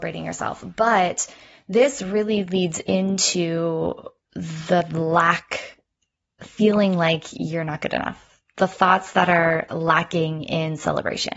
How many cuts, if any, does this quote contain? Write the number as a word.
zero